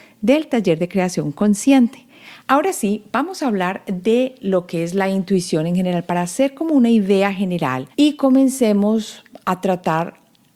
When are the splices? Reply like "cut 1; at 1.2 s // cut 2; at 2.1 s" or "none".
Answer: cut 1; at 2.4 s // cut 2; at 7.9 s